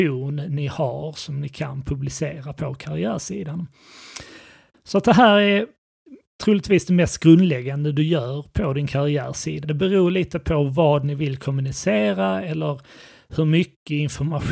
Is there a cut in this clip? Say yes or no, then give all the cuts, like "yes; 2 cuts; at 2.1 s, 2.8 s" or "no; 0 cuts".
yes; 2 cuts; at 4.7 s, 9.6 s